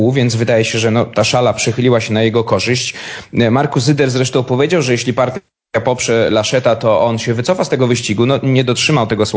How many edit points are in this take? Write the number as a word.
zero